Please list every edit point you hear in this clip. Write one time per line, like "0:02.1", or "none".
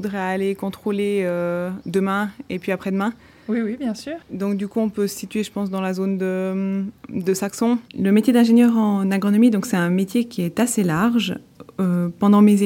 0:04.2
0:07.9